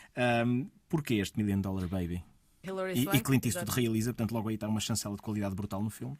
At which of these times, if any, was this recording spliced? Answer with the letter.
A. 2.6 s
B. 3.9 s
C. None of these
A